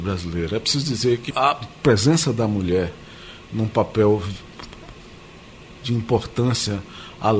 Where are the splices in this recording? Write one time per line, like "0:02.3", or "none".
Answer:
0:01.3